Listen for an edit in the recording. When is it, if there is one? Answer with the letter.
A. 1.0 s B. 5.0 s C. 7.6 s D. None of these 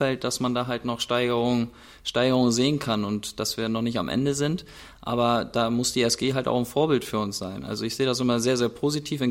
D